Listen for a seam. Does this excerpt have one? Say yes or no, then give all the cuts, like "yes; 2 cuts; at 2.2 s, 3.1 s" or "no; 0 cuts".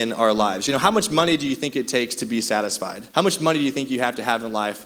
yes; 1 cut; at 3.1 s